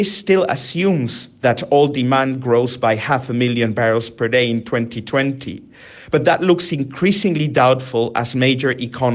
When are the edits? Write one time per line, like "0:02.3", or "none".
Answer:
none